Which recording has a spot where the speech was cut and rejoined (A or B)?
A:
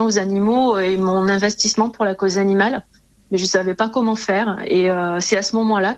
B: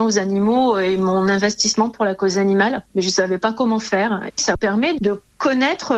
B